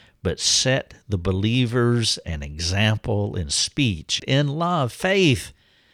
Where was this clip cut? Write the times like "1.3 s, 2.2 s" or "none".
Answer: 4.2 s